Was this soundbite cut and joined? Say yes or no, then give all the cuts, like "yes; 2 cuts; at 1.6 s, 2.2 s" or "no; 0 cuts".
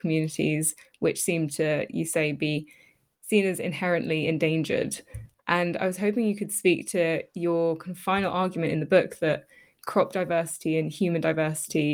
yes; 1 cut; at 5.4 s